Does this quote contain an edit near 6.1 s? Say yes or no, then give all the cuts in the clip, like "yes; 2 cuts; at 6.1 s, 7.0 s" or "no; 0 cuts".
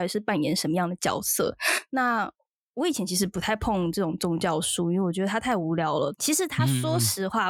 yes; 1 cut; at 6.1 s